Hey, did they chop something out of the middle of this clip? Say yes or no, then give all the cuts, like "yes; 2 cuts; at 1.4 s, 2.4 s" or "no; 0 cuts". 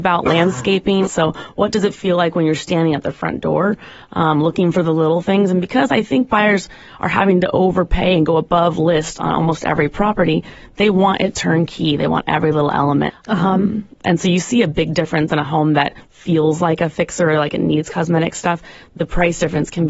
yes; 2 cuts; at 1.1 s, 13.1 s